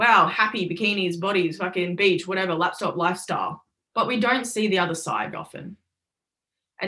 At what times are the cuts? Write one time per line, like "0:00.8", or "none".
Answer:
0:03.9
0:05.3